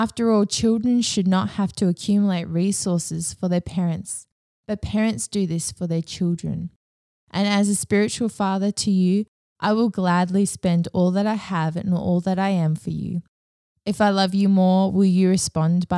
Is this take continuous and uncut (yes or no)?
yes